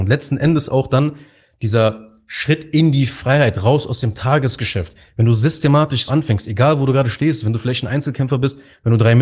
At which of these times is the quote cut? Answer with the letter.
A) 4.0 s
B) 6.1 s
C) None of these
B